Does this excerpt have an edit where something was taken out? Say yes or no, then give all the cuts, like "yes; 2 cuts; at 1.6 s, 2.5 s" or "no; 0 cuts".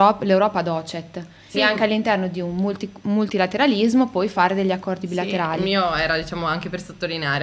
yes; 1 cut; at 1.5 s